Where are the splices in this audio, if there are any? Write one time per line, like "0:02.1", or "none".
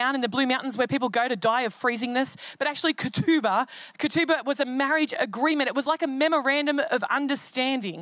none